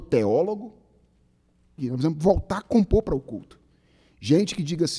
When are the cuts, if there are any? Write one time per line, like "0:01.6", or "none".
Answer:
0:01.8